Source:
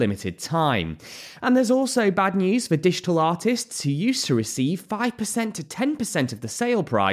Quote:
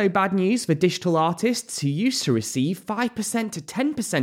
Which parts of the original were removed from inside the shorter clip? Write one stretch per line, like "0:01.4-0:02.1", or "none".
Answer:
none